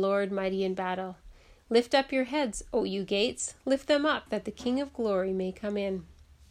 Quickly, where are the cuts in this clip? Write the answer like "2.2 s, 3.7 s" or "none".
4.3 s